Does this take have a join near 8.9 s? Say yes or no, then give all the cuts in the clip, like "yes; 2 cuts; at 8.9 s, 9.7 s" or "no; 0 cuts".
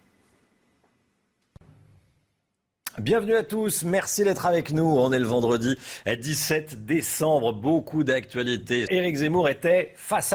yes; 1 cut; at 8.9 s